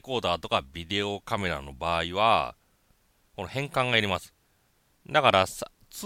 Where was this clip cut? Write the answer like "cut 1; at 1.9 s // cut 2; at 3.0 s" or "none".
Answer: cut 1; at 4.9 s

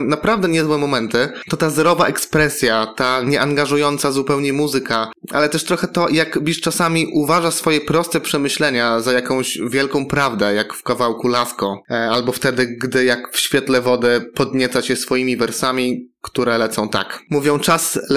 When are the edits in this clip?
none

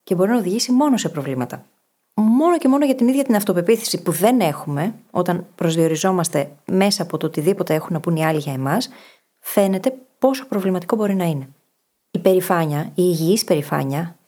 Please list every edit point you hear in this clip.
none

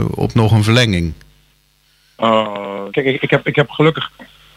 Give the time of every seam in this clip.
cut 1; at 2.9 s

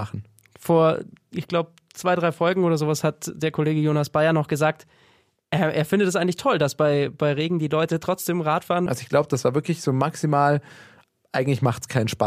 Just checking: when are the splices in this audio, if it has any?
cut 1; at 8.9 s

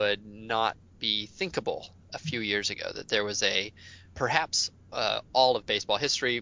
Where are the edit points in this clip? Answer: cut 1; at 4.1 s

